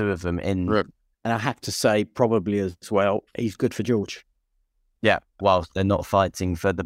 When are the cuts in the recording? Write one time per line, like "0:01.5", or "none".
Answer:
0:01.1
0:05.4